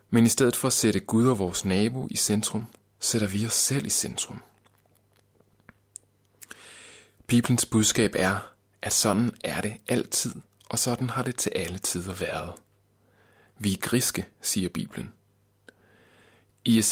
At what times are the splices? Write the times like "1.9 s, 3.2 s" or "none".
none